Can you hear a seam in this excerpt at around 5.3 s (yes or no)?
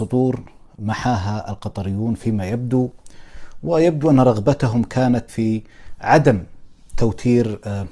yes